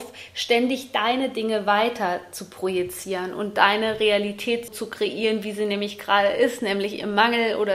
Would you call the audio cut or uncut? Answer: cut